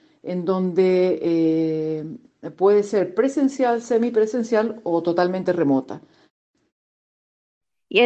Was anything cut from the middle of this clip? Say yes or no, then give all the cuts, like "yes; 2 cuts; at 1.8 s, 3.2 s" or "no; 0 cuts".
no; 0 cuts